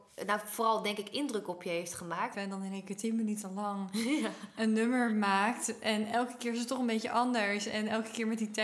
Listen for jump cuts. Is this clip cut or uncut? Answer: cut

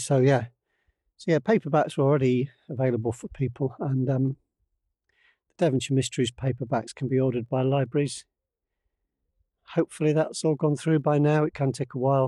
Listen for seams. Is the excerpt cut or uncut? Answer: uncut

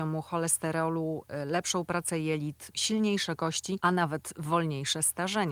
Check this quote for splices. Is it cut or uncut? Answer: cut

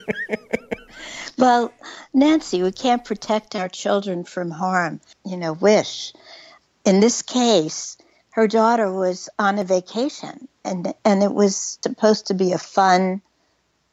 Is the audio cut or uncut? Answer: cut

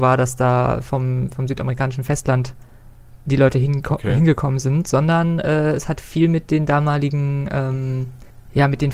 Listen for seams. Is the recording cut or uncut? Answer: uncut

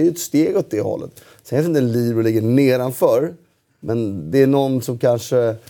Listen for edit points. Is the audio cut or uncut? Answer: uncut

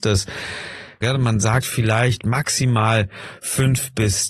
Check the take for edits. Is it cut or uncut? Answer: cut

